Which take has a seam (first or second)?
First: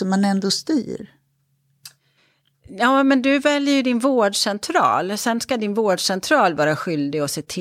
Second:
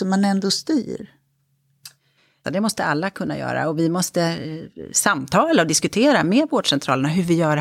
second